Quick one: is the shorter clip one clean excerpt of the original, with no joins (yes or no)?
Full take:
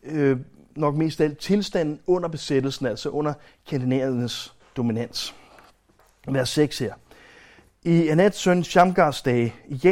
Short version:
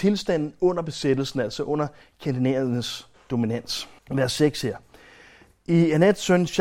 no